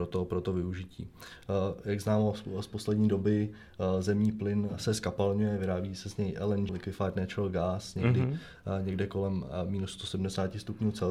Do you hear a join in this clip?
yes; 1 cut; at 6.7 s

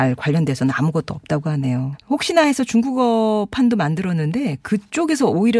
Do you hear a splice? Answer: yes; 1 cut; at 1.9 s

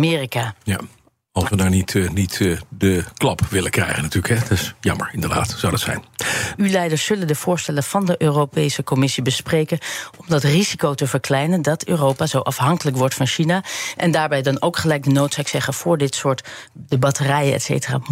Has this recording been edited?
yes; 1 cut; at 6.6 s

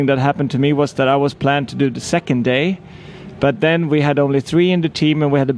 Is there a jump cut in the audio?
no; 0 cuts

